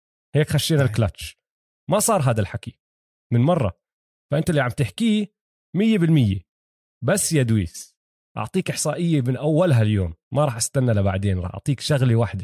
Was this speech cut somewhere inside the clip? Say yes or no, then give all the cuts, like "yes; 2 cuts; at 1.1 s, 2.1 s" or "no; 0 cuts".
no; 0 cuts